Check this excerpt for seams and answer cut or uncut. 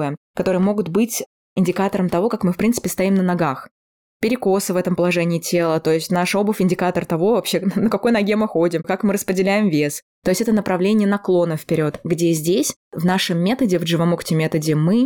cut